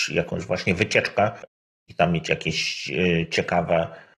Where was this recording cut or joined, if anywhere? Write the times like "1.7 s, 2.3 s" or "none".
1.9 s